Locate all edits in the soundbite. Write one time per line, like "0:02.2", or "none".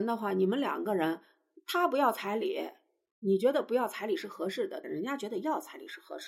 0:04.8